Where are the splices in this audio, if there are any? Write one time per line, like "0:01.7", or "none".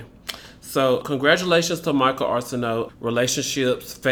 0:01.0
0:02.9